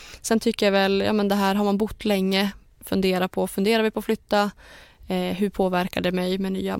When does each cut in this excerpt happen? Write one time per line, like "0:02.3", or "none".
none